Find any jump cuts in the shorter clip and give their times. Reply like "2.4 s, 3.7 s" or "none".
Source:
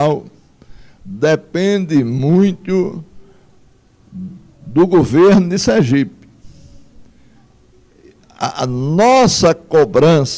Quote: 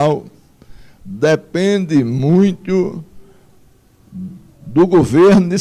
none